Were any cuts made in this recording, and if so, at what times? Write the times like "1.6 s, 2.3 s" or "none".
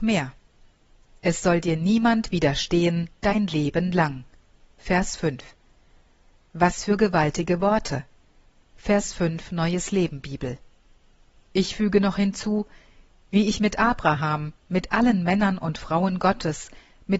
8.6 s